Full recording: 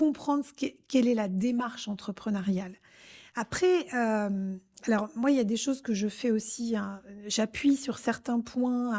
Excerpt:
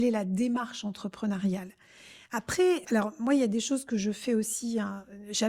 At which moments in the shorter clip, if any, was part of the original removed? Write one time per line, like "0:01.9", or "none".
0:02.8